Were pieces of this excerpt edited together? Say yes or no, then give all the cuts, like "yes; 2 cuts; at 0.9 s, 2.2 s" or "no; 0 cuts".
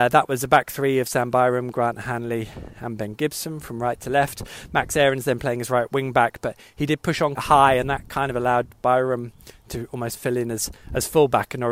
yes; 1 cut; at 7.3 s